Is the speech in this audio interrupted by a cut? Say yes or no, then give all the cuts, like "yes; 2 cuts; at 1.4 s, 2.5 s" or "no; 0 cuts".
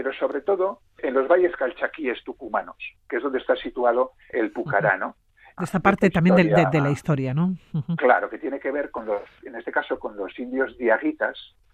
yes; 1 cut; at 5.6 s